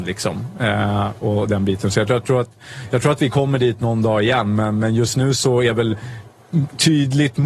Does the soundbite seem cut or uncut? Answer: uncut